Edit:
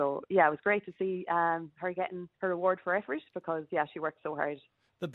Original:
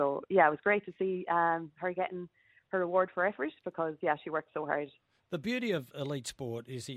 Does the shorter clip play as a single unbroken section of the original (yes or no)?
no